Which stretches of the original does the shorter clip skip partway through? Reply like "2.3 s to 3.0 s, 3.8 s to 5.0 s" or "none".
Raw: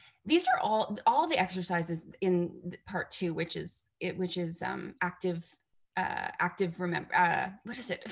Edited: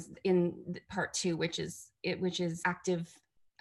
4.6 s to 5.0 s